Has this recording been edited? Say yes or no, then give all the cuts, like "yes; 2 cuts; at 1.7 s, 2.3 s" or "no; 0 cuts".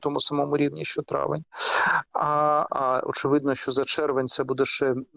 yes; 1 cut; at 2.7 s